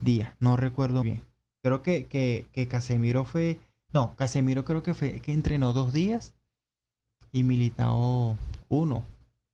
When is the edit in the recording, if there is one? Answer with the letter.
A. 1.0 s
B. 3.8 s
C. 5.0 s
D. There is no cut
A